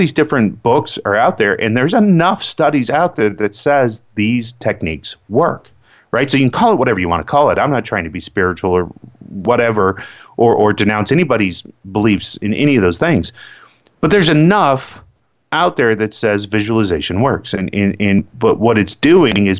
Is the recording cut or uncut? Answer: cut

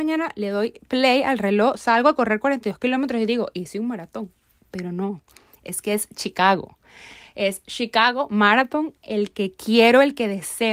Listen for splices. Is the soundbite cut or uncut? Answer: uncut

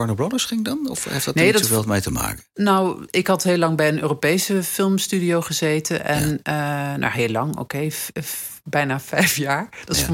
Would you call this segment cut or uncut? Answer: cut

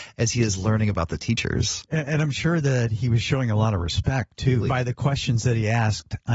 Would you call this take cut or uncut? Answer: cut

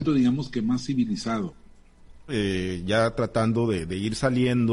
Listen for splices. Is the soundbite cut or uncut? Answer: cut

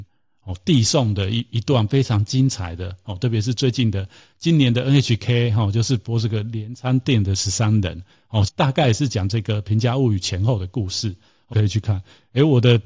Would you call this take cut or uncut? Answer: cut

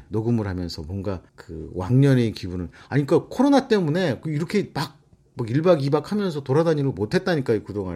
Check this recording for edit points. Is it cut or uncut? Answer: cut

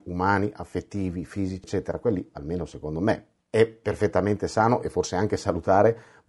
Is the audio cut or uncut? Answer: cut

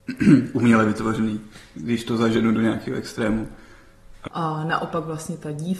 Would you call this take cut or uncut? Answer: cut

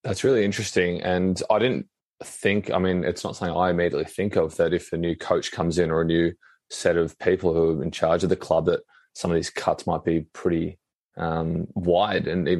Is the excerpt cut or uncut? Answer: uncut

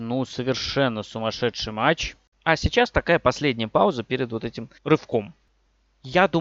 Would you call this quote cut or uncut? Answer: cut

